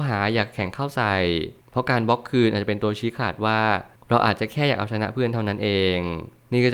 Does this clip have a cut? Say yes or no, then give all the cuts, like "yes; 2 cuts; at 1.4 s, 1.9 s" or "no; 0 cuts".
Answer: no; 0 cuts